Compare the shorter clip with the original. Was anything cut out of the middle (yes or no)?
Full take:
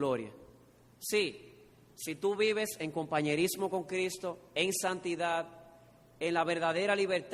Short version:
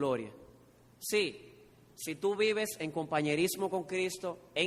no